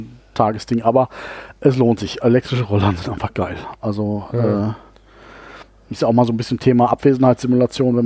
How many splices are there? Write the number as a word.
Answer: zero